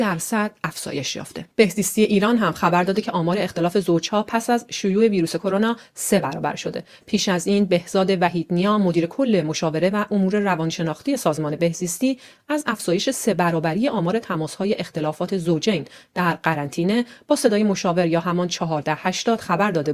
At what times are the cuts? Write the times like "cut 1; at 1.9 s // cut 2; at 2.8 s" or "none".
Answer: cut 1; at 1.5 s